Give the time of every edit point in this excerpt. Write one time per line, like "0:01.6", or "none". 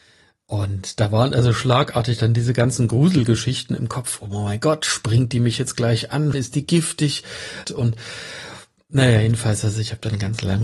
0:06.3
0:07.6